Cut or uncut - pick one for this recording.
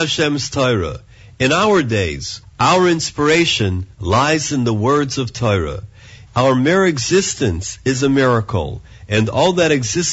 cut